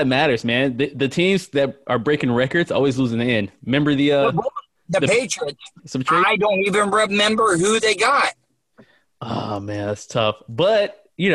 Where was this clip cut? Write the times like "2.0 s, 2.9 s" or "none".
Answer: 5.8 s